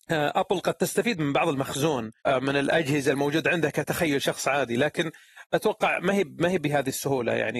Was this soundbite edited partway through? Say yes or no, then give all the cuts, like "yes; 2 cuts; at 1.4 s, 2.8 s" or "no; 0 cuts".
yes; 1 cut; at 2.2 s